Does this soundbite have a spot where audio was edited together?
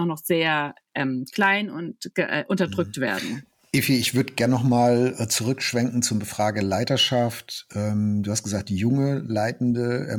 no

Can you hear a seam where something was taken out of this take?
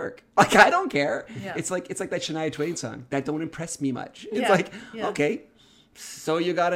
no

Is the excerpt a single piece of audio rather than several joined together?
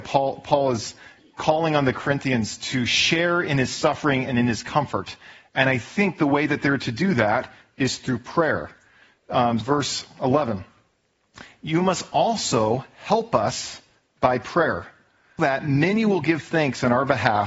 no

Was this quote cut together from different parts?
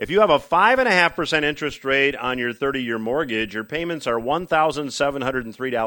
no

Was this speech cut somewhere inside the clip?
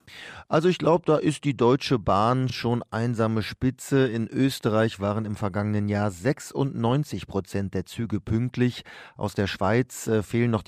no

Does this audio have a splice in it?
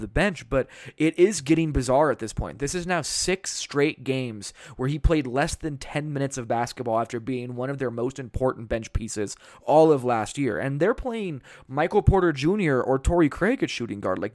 no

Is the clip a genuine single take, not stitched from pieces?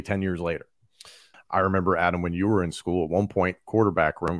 no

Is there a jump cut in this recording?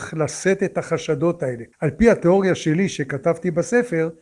yes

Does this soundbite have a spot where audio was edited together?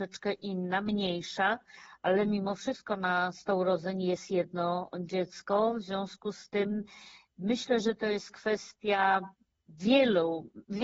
no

